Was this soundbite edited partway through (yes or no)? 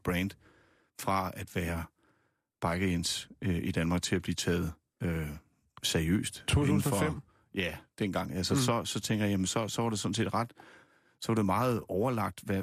no